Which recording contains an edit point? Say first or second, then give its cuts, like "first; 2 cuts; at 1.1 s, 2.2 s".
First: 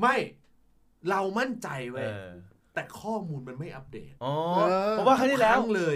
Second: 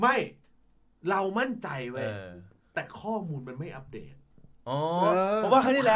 first; 1 cut; at 4.2 s